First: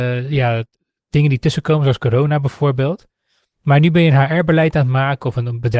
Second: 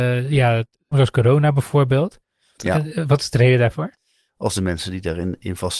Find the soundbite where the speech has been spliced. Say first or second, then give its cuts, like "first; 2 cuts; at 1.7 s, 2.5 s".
second; 3 cuts; at 0.9 s, 2.6 s, 4.3 s